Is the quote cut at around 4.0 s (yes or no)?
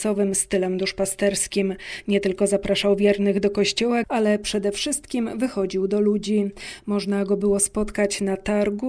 yes